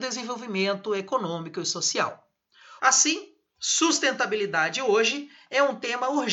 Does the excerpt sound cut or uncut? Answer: cut